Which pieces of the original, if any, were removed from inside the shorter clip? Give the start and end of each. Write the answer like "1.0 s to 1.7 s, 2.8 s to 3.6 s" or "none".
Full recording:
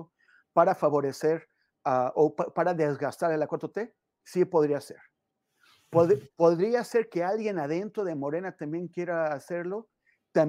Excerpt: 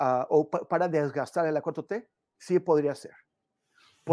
none